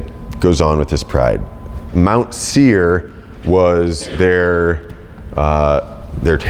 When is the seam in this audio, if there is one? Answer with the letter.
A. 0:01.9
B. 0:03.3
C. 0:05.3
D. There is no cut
A